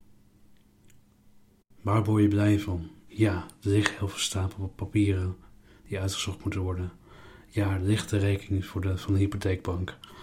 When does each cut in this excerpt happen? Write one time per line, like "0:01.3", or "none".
0:03.1